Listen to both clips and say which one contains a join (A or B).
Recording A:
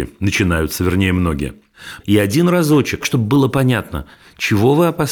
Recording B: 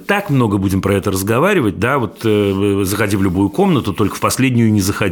A